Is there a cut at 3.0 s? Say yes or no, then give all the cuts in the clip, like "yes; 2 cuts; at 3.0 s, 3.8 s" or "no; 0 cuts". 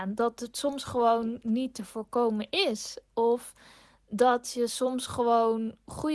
no; 0 cuts